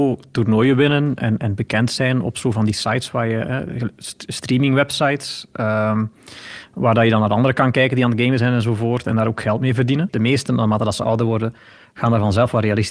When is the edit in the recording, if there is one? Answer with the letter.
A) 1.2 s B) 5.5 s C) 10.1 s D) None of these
C